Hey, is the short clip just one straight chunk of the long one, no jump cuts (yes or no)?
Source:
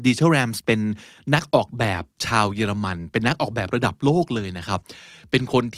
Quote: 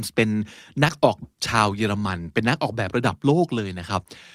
no